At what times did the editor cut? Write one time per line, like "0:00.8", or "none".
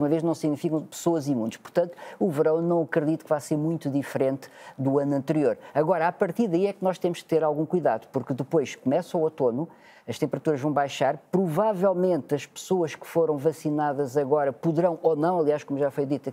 none